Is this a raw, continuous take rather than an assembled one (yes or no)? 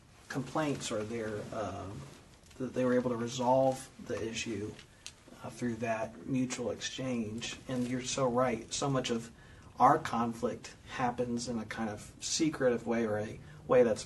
yes